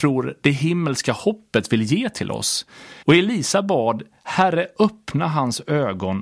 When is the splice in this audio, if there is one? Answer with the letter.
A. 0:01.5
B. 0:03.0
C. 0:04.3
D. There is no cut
B